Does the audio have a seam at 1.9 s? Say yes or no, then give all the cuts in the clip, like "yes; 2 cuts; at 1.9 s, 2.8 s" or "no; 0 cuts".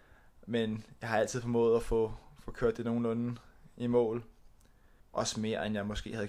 no; 1 cut; at 5.0 s